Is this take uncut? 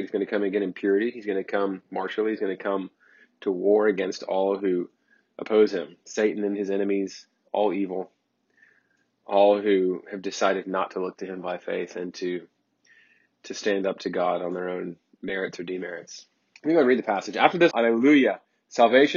no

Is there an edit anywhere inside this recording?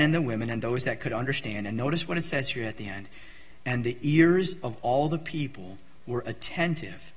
no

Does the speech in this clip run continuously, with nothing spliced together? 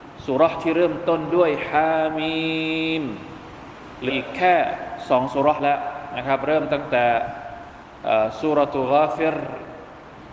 no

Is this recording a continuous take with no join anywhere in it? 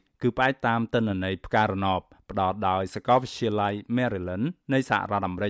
yes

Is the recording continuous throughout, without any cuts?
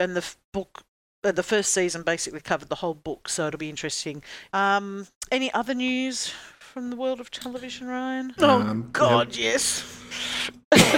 no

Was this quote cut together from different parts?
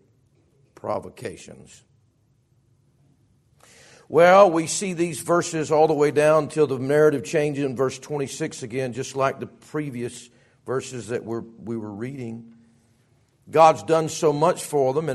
no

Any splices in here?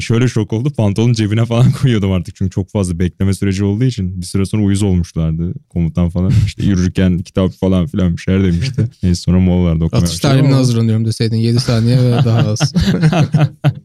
no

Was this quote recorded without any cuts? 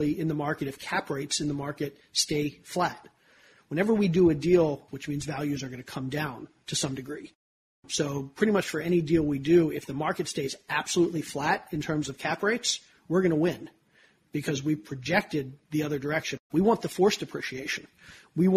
no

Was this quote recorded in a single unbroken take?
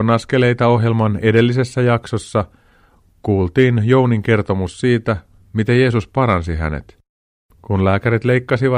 yes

